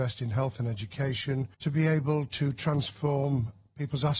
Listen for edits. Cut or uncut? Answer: cut